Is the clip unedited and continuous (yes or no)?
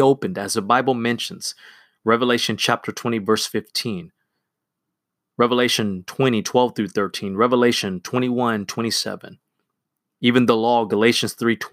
yes